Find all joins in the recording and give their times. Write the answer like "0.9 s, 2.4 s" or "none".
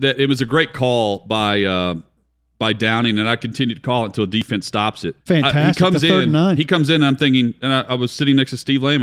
5.2 s